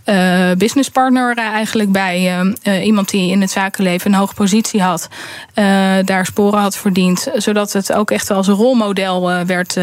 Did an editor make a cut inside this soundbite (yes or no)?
no